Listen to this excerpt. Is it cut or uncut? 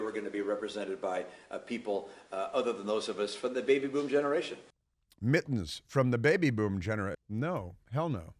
cut